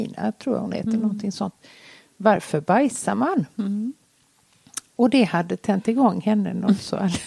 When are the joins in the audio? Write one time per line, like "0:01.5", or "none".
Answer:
none